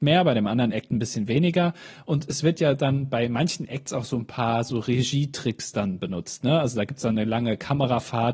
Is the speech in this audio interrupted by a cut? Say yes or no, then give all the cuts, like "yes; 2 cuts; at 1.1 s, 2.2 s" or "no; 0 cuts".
no; 0 cuts